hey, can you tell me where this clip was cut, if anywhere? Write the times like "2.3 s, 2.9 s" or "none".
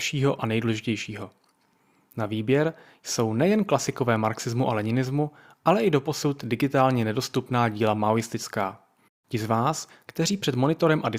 9.1 s

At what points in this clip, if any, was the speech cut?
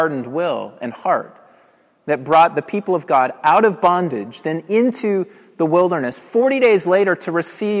none

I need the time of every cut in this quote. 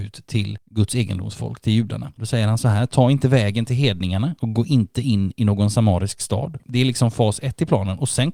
2.2 s, 6.6 s

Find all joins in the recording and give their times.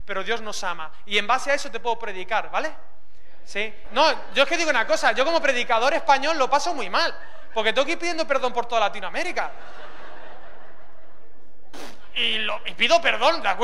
3.8 s

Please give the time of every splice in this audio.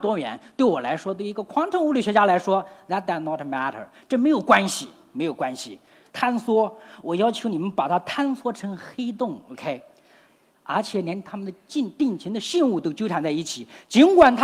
6.1 s, 10.5 s

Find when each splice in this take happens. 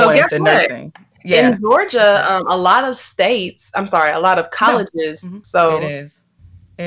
5.4 s

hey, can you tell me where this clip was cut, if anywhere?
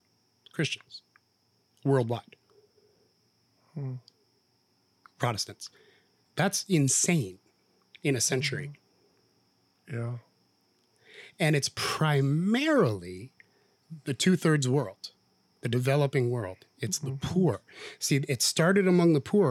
none

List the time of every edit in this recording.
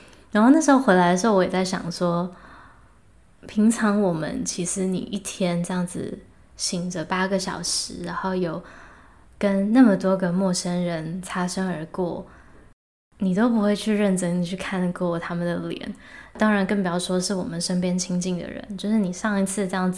none

